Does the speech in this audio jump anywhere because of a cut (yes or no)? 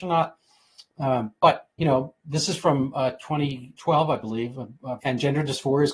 yes